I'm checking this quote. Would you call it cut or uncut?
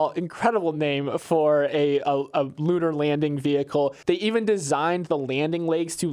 cut